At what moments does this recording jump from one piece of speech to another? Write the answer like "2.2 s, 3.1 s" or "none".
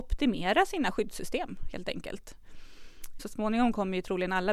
3.2 s